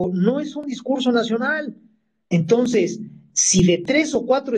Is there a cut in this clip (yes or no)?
yes